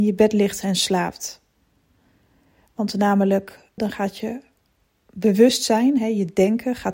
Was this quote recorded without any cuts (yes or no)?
no